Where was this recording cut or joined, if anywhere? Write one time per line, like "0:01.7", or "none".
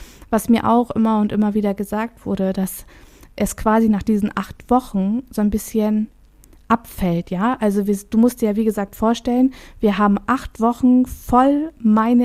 none

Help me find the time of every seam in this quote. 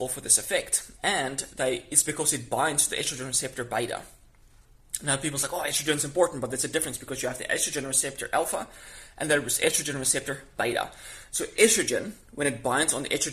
none

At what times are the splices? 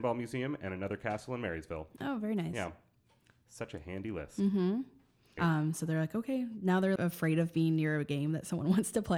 0:05.4
0:07.0

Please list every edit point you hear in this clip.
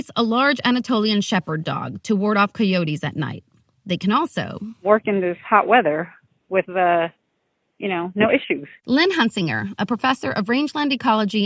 none

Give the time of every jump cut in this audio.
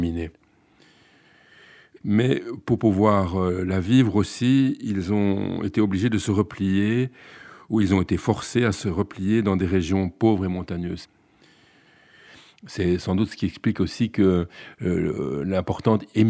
0:02.0

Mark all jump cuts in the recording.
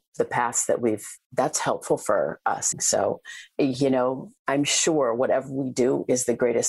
0:01.2
0:02.7

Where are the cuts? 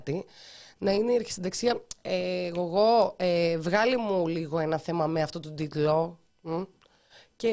none

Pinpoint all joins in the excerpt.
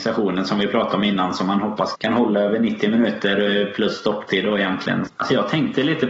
0:01.9
0:05.1

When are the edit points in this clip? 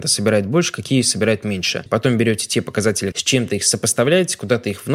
0:01.9
0:03.1

